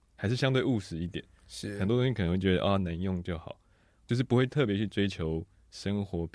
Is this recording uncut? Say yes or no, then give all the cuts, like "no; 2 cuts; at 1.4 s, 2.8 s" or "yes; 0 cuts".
yes; 0 cuts